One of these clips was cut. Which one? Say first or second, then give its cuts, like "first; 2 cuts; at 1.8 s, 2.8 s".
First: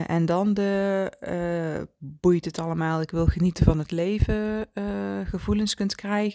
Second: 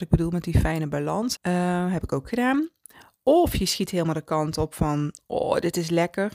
second; 1 cut; at 1.4 s